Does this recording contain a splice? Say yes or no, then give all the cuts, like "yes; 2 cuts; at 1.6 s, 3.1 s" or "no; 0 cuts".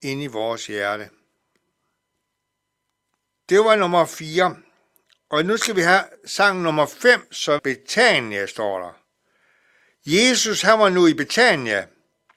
yes; 1 cut; at 7.6 s